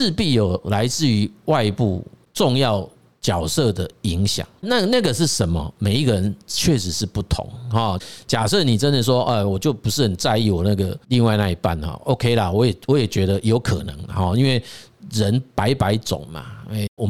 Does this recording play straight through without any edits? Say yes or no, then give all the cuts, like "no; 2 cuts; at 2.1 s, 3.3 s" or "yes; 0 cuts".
no; 1 cut; at 11.0 s